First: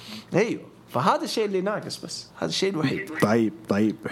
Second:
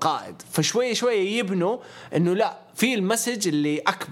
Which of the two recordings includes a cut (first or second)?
first